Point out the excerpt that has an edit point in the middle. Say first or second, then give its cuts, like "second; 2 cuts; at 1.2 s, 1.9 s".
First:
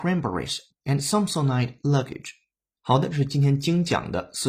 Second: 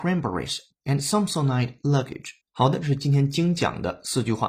second; 1 cut; at 2.4 s